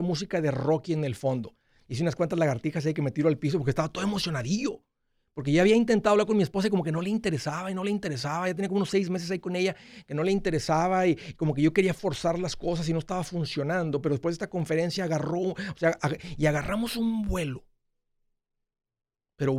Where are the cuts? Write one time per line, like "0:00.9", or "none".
0:01.8